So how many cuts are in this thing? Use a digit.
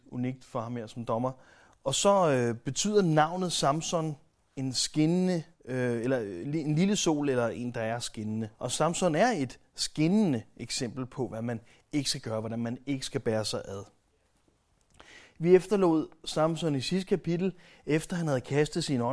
2